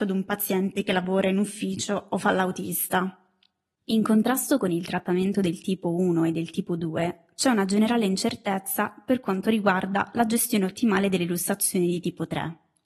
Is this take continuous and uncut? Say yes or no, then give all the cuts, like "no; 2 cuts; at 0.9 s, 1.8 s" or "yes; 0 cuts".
yes; 0 cuts